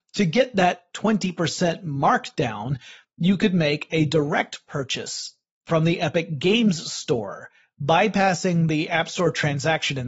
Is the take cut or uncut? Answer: uncut